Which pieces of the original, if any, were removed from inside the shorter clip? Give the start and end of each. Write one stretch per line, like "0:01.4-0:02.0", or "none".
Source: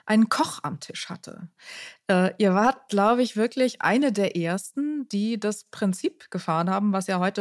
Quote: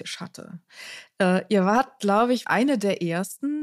0:03.3-0:03.8